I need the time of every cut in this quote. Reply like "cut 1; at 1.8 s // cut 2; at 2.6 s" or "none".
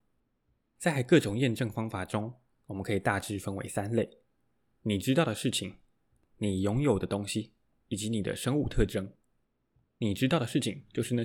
none